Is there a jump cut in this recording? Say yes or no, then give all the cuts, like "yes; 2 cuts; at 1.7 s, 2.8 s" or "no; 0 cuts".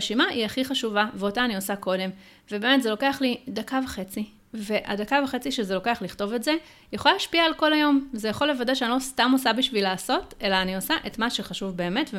no; 0 cuts